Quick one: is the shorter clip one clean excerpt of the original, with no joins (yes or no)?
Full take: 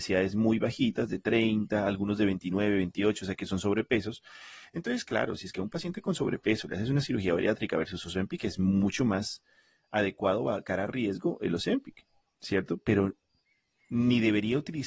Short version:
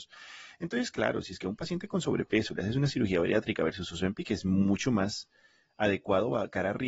yes